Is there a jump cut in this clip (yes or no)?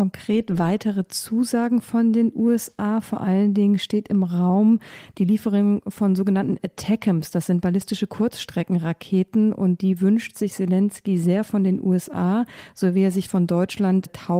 no